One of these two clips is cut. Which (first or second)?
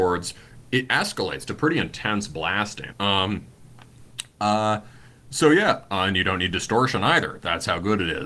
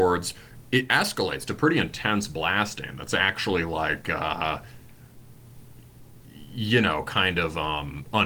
first